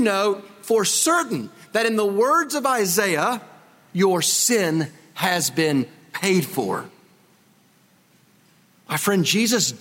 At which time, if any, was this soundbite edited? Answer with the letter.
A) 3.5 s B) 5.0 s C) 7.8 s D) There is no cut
D